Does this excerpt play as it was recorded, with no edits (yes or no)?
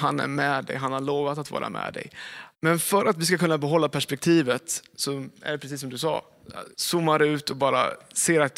no